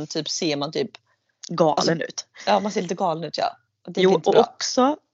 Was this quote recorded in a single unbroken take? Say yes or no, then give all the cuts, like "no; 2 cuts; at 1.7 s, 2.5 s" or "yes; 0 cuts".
yes; 0 cuts